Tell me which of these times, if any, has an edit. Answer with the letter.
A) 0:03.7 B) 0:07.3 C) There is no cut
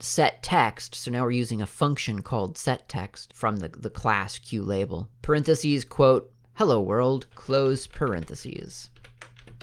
B